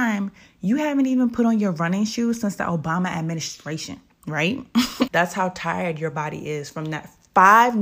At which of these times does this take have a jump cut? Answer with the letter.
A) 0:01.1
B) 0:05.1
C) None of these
B